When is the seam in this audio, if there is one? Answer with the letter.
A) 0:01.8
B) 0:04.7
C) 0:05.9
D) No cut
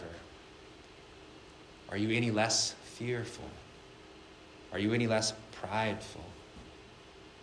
D